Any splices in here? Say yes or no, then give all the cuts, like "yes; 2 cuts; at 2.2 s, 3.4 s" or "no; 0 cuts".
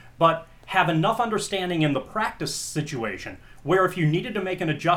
no; 0 cuts